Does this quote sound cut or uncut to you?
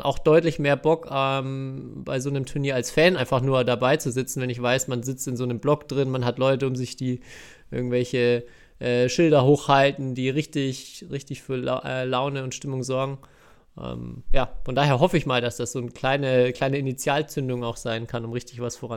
uncut